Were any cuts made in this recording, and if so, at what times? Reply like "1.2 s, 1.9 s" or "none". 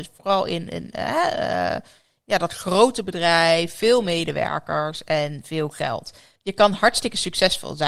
6.4 s